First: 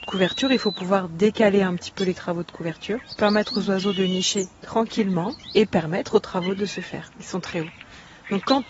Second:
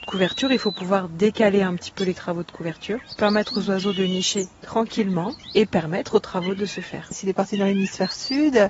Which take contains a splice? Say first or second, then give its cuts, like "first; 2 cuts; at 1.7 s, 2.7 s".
first; 1 cut; at 7.1 s